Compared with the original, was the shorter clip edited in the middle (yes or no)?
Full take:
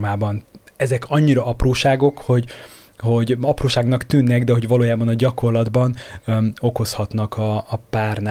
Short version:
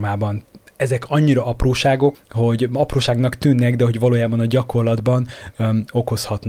yes